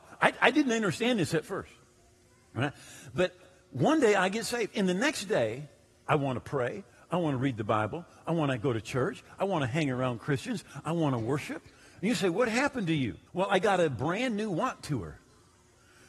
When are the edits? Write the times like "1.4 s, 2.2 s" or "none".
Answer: 13.3 s